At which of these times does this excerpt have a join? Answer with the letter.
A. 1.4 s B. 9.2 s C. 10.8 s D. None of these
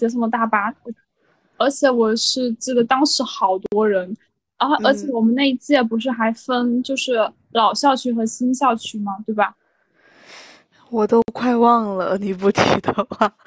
D